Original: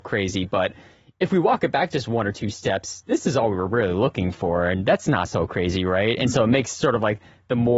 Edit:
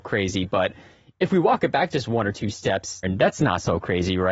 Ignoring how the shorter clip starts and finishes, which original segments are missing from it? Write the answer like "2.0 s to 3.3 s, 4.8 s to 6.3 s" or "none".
3.0 s to 4.7 s